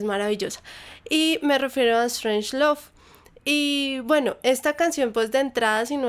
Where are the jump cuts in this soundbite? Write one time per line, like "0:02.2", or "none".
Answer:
none

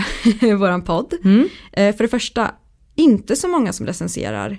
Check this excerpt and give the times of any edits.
none

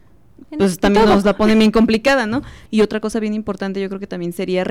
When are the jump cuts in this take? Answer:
0:02.7

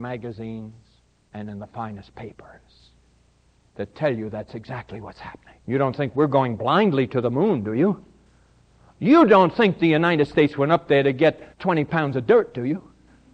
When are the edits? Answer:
0:05.6
0:11.5

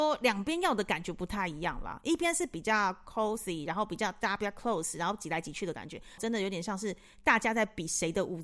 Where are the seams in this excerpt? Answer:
0:06.2

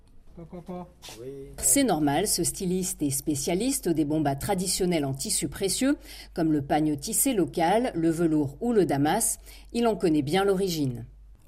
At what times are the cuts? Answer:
0:01.6

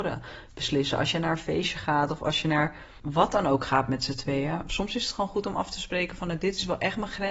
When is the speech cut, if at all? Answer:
none

